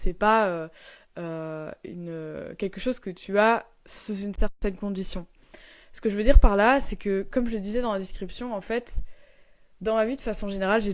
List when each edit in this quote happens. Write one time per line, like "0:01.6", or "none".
none